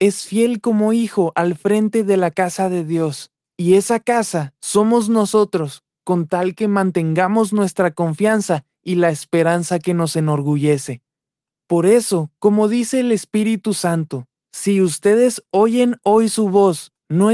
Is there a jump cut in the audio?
no; 0 cuts

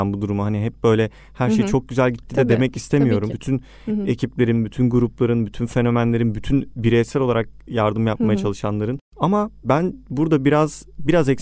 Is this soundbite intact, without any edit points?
no; 1 cut; at 3.3 s

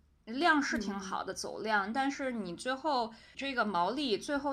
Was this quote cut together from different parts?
yes; 1 cut; at 3.3 s

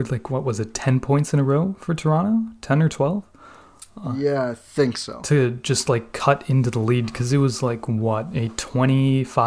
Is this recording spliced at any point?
no; 0 cuts

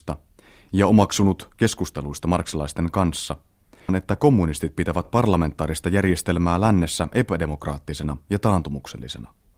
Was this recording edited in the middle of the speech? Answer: yes; 1 cut; at 3.9 s

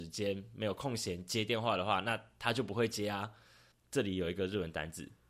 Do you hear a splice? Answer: yes; 1 cut; at 3.7 s

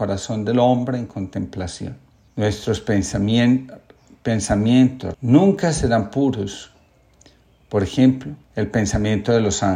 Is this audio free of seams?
no; 3 cuts; at 2.3 s, 5.1 s, 8.4 s

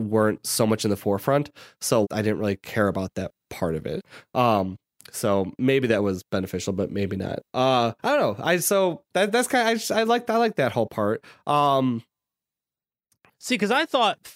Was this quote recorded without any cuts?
no; 2 cuts; at 2.0 s, 8.0 s

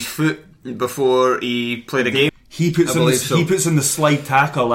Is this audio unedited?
no; 1 cut; at 2.3 s

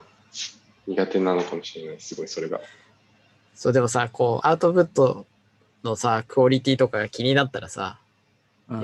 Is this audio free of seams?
no; 1 cut; at 4.4 s

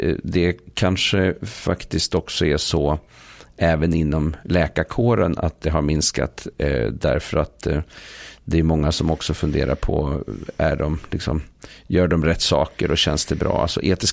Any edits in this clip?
no; 0 cuts

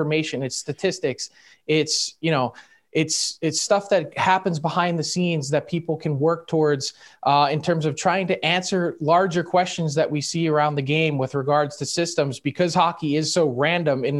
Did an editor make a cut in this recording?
no; 0 cuts

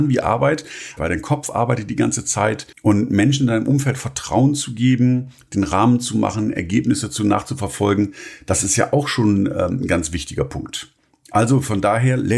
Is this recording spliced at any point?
yes; 2 cuts; at 1.0 s, 2.7 s

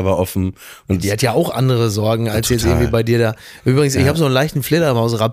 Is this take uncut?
yes; 0 cuts

